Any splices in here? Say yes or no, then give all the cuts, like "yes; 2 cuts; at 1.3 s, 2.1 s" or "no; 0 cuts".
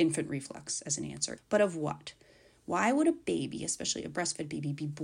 yes; 1 cut; at 1.4 s